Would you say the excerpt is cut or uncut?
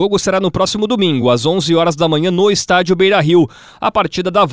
uncut